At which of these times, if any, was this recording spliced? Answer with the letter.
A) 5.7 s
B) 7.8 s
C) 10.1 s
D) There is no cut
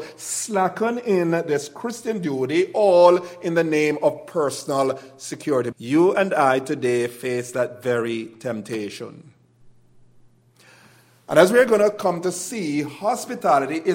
A